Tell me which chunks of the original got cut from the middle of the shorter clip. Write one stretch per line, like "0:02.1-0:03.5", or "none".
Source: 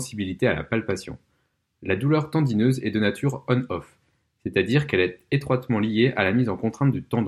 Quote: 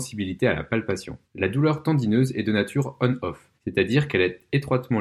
0:01.3-0:01.7
0:04.0-0:04.3

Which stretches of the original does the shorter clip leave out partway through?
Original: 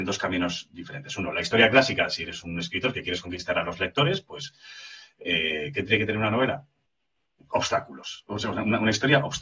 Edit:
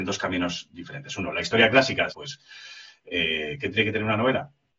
0:02.1-0:04.2

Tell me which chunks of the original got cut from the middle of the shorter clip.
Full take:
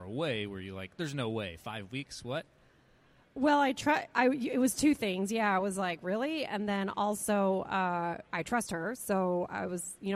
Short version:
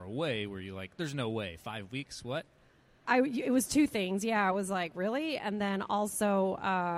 0:03.0-0:04.1

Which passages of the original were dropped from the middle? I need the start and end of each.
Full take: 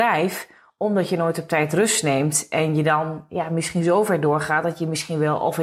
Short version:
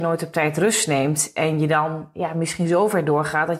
none

